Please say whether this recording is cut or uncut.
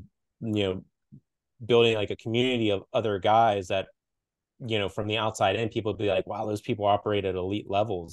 uncut